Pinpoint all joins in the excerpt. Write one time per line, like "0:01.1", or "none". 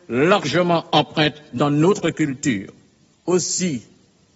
0:03.1